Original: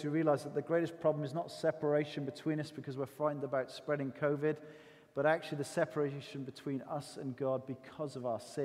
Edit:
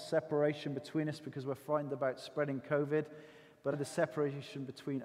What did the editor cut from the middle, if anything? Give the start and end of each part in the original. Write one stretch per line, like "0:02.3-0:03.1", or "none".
0:05.2-0:05.5